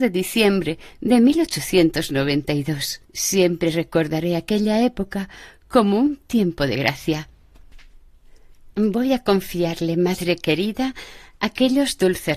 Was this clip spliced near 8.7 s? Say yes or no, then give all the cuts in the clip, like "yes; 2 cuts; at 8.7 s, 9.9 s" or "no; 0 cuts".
no; 1 cut; at 3.1 s